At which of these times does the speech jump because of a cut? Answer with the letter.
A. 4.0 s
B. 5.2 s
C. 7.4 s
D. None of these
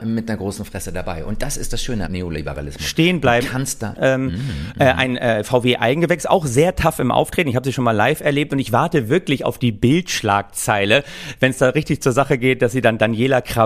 A